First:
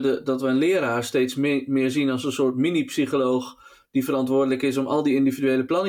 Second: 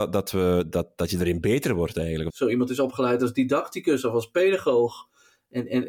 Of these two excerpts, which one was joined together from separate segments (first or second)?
second